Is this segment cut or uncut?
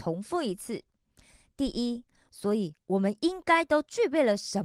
cut